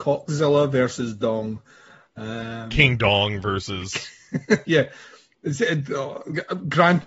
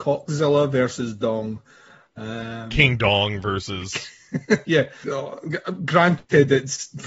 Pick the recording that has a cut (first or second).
second